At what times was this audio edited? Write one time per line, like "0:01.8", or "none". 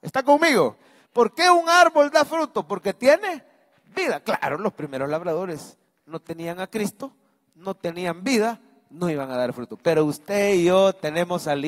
none